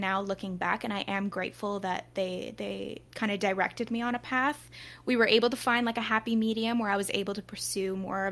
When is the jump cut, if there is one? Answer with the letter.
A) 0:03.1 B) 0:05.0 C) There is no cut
A